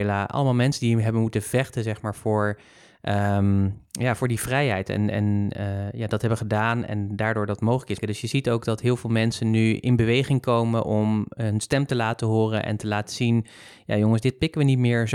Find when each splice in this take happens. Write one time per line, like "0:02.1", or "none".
0:08.0